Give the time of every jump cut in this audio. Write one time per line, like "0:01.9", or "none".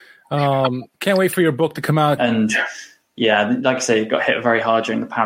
0:00.9
0:02.2